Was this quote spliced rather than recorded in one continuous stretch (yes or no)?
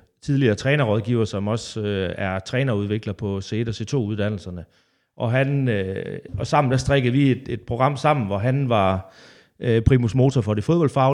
no